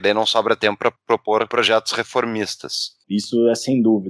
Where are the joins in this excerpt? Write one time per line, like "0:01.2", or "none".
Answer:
0:03.0